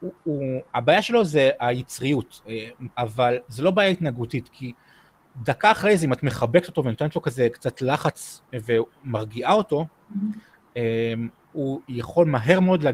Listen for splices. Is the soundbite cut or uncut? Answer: cut